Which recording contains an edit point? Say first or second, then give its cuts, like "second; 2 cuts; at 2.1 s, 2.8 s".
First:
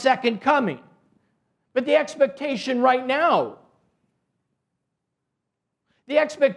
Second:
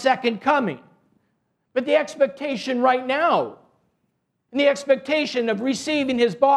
second; 1 cut; at 4.5 s